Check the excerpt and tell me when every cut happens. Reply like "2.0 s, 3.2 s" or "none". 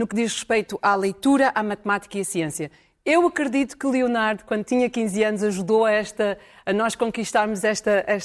none